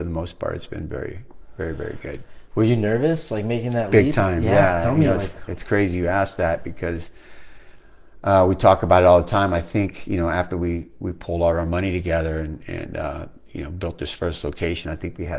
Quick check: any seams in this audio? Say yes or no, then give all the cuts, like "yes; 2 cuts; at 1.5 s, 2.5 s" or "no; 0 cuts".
no; 0 cuts